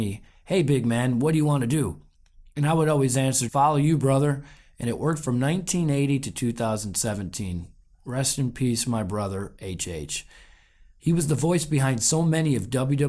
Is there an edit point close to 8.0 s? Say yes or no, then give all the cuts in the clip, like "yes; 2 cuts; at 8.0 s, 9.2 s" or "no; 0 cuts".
no; 2 cuts; at 3.5 s, 11.0 s